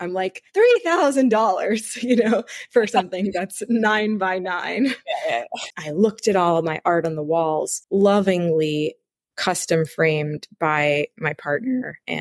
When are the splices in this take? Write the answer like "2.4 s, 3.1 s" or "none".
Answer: 5.7 s, 7.8 s